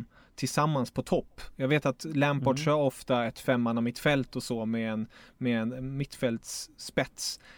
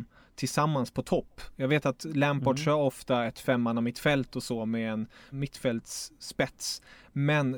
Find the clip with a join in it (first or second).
second